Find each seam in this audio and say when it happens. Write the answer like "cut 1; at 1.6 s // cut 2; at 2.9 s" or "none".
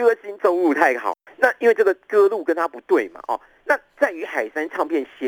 cut 1; at 1.3 s

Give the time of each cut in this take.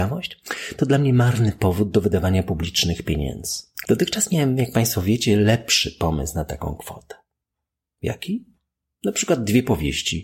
cut 1; at 3.8 s

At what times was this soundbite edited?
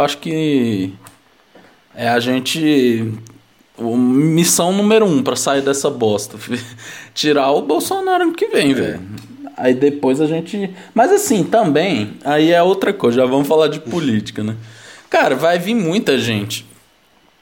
none

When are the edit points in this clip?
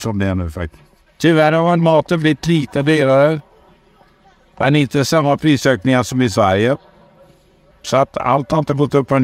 cut 1; at 1.1 s // cut 2; at 7.7 s

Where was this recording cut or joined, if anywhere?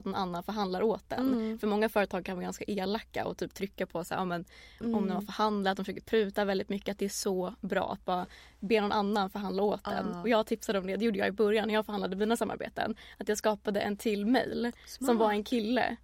cut 1; at 4.8 s

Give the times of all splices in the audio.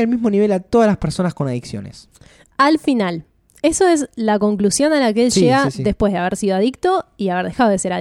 none

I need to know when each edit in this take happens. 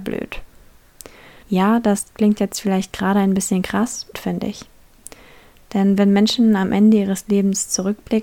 cut 1; at 1.4 s // cut 2; at 4.1 s

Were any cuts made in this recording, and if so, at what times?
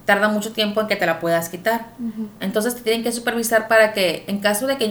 cut 1; at 2.4 s

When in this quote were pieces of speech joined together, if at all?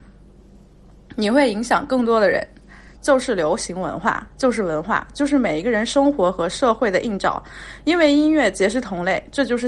cut 1; at 3.0 s

